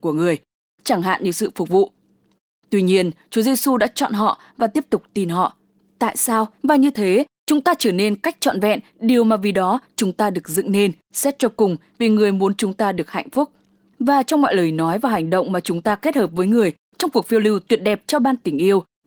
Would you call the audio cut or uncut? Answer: cut